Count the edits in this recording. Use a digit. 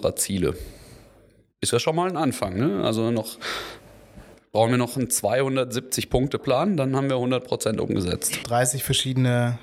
1